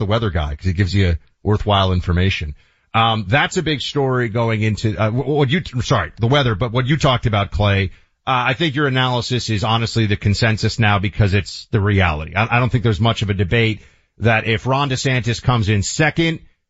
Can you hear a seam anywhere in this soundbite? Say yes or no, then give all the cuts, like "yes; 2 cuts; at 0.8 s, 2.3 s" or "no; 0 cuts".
no; 0 cuts